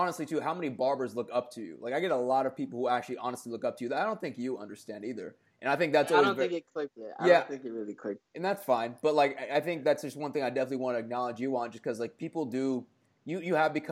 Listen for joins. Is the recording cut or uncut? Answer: uncut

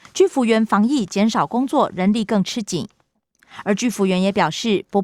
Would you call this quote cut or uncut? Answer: uncut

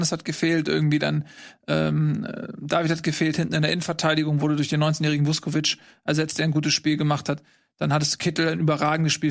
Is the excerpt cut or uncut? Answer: uncut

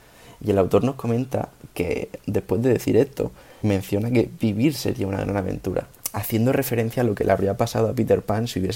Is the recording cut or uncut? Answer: cut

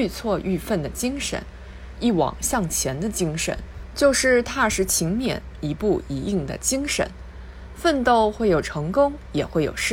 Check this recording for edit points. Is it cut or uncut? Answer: cut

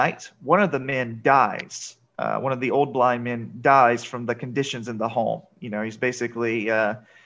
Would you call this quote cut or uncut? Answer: uncut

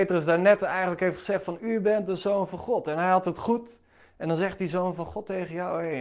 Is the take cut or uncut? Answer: uncut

